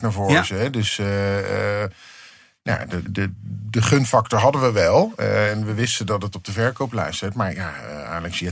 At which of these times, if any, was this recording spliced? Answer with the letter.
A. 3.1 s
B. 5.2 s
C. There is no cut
A